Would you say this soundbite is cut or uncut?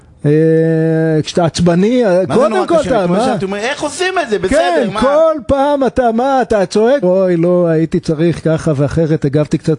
cut